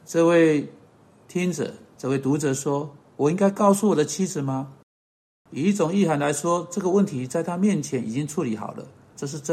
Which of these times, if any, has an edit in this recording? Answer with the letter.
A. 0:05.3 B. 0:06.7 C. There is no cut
A